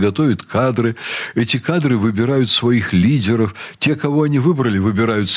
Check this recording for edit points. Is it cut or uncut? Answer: uncut